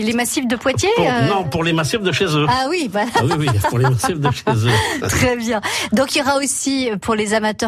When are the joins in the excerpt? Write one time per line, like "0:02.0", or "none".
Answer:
none